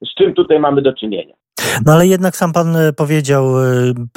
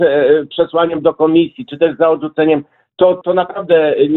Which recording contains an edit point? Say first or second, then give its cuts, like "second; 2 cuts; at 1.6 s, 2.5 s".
second; 1 cut; at 3.2 s